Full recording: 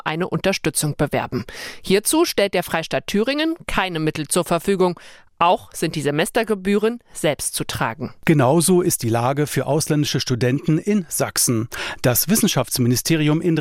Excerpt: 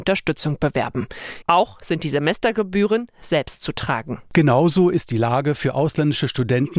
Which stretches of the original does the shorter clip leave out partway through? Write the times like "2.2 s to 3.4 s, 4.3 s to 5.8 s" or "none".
1.8 s to 5.3 s